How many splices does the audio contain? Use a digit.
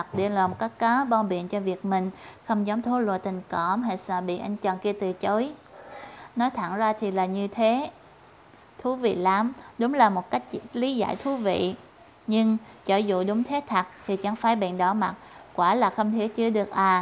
0